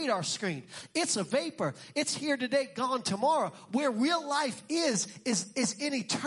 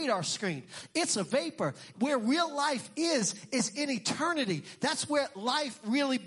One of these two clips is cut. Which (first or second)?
second